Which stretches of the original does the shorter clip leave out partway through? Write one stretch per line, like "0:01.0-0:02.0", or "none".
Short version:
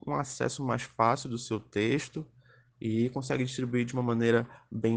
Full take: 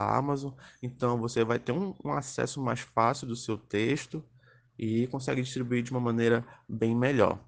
none